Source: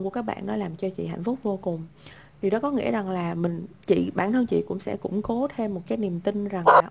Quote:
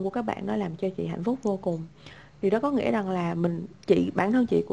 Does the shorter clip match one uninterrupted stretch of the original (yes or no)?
yes